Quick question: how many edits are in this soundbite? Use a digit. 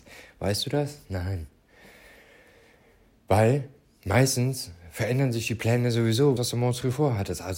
1